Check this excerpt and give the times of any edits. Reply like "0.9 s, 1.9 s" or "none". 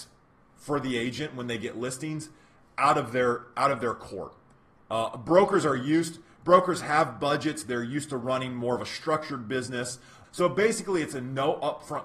10.2 s